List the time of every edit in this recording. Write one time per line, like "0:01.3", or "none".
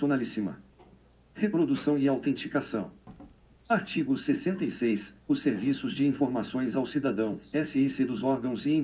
none